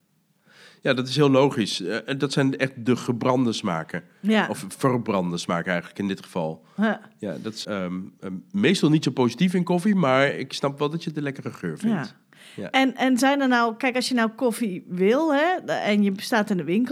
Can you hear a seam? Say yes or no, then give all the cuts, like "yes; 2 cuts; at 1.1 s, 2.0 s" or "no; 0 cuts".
yes; 1 cut; at 7.6 s